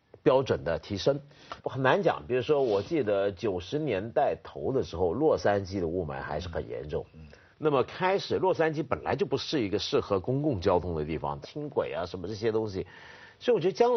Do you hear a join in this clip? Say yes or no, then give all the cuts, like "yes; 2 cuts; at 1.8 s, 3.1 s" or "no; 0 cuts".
yes; 3 cuts; at 1.6 s, 7.5 s, 11.4 s